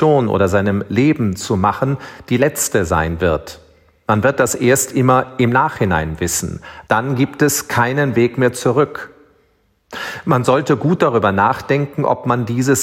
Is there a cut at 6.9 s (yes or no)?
yes